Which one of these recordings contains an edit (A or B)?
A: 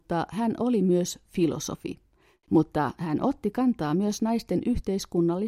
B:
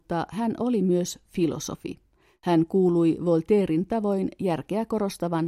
A